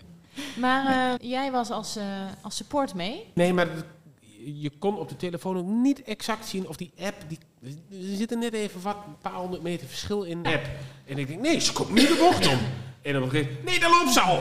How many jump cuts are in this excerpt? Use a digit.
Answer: 3